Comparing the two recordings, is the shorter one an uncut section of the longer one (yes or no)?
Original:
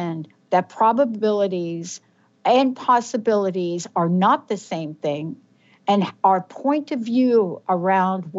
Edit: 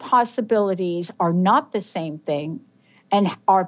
yes